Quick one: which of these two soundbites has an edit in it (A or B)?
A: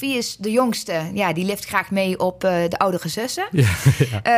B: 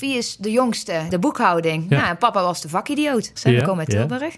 B